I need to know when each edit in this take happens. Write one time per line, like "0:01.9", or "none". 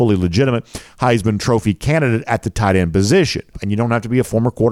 0:03.5